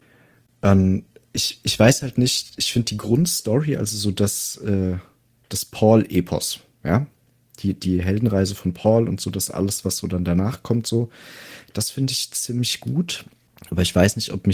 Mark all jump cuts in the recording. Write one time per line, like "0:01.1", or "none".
none